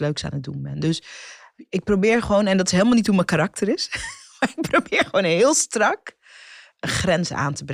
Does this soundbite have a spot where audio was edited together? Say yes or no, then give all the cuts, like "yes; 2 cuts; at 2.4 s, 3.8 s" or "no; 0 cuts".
no; 0 cuts